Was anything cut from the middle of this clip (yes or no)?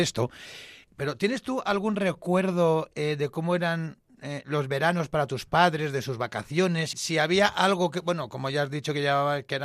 yes